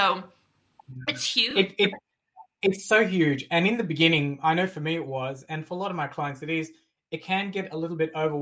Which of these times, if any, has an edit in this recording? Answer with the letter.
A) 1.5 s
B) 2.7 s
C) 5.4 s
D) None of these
D